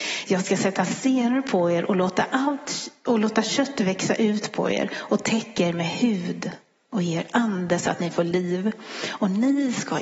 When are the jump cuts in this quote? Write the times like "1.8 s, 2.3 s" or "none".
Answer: none